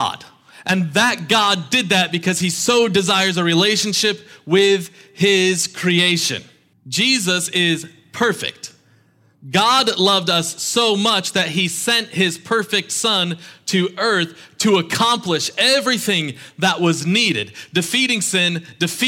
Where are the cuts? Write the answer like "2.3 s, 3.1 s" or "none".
6.7 s